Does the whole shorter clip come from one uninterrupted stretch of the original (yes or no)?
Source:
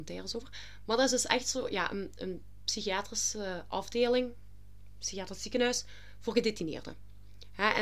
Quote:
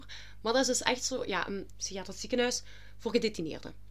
no